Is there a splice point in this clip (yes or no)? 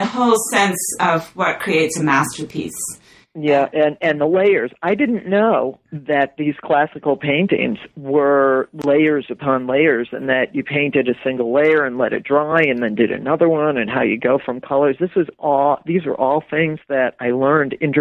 no